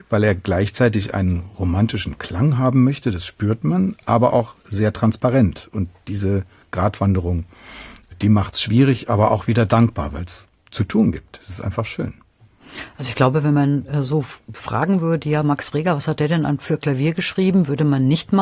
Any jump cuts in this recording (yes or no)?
no